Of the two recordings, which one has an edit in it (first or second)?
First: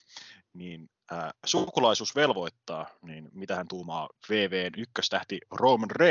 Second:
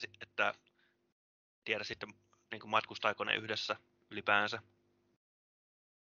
first